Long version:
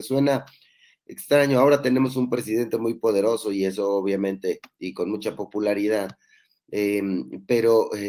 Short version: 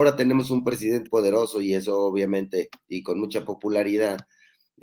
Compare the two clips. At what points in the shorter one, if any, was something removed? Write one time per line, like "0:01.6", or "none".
0:01.1